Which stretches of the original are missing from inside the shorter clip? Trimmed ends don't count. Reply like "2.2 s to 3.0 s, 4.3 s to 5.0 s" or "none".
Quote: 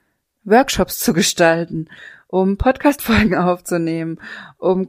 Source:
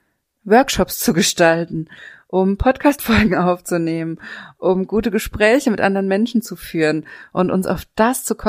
none